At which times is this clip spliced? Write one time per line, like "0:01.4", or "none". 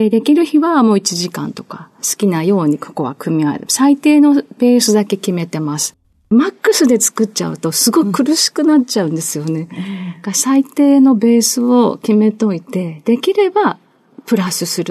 none